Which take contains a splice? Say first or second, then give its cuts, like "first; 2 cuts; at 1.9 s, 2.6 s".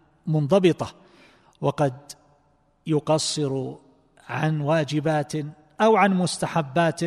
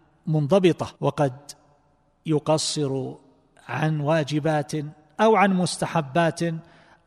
second; 1 cut; at 0.9 s